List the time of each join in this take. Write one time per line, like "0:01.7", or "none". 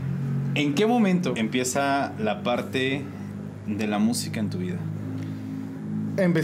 0:01.3

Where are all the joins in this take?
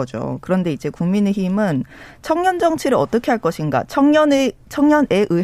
none

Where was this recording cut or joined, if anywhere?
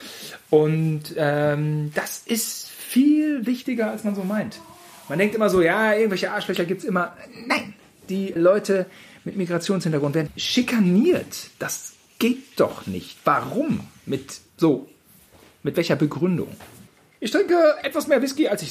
0:08.4

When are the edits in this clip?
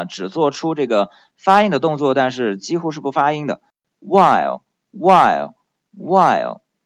0:04.0
0:05.9

